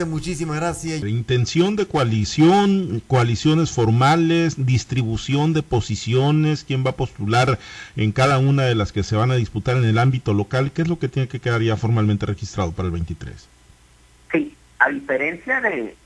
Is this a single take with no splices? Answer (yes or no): no